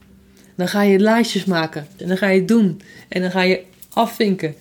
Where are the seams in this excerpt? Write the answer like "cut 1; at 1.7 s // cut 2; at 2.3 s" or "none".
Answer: cut 1; at 2.0 s